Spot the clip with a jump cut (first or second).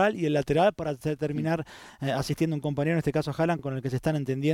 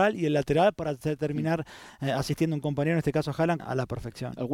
second